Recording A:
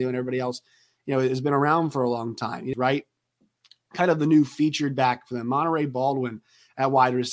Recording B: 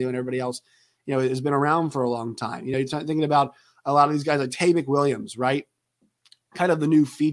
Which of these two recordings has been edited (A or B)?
A